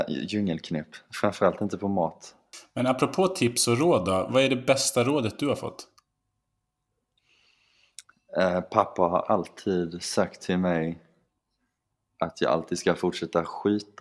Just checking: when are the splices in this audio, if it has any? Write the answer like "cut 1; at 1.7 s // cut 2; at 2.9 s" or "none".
cut 1; at 4.3 s